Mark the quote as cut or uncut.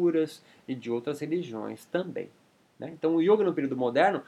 uncut